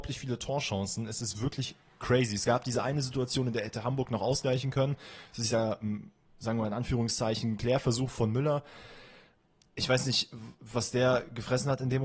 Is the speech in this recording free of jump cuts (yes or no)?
yes